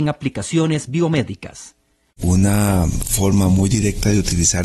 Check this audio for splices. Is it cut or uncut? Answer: cut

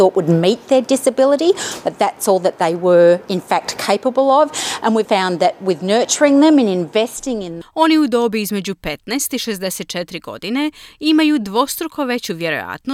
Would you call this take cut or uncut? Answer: cut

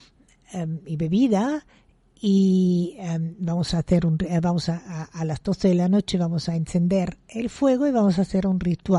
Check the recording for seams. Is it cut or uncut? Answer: uncut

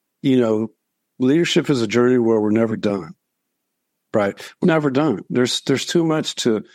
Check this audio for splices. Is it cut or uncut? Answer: cut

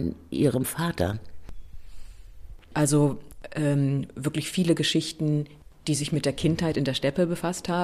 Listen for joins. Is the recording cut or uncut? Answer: cut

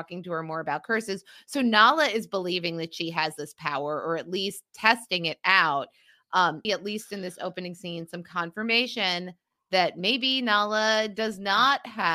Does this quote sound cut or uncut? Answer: cut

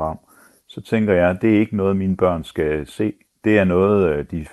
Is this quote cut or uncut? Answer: uncut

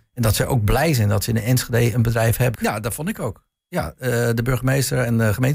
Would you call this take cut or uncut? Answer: cut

